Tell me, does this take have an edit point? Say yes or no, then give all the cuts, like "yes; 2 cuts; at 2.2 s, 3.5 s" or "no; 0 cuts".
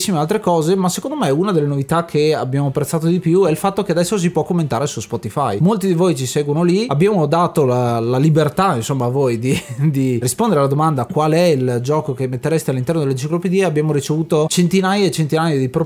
no; 0 cuts